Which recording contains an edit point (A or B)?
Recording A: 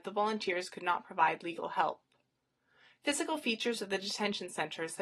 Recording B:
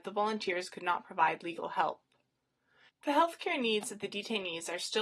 B